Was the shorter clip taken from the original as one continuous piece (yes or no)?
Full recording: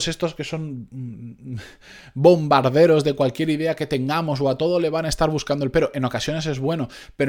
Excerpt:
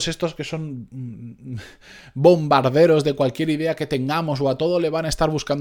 yes